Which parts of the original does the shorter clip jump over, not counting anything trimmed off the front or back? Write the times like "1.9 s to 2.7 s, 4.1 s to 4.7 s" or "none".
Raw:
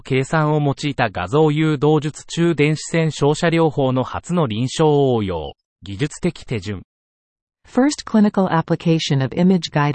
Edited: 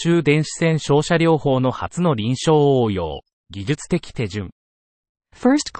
none